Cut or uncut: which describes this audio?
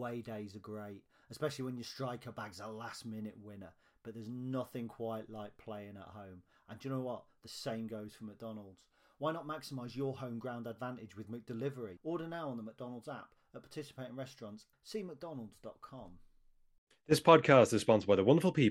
cut